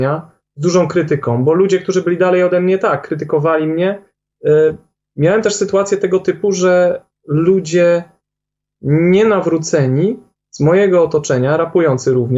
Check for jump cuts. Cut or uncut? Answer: cut